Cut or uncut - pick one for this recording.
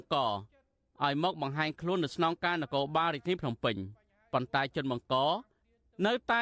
uncut